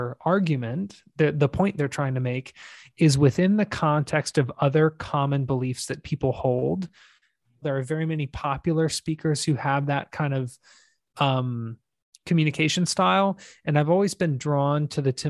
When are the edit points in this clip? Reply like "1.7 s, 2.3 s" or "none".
7.6 s